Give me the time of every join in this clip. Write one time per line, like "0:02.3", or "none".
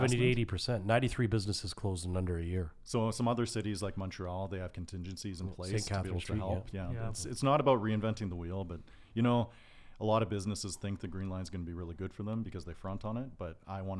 none

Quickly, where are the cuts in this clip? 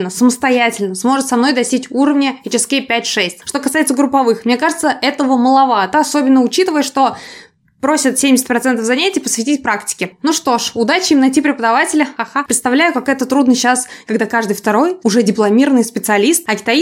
0:15.0

